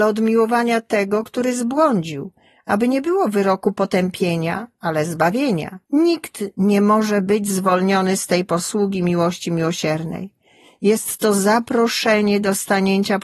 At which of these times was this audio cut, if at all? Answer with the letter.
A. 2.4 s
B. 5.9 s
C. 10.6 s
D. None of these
B